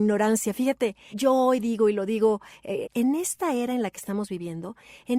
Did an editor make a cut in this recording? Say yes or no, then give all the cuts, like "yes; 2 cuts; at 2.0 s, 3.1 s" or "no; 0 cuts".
yes; 2 cuts; at 1.1 s, 2.8 s